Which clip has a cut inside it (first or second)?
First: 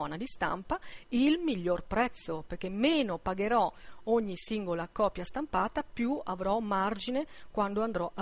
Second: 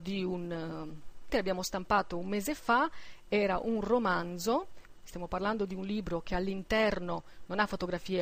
second